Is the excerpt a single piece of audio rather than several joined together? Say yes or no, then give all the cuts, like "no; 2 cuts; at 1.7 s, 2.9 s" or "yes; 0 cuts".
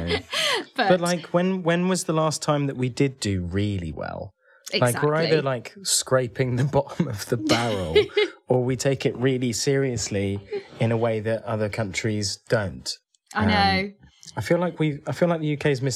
yes; 0 cuts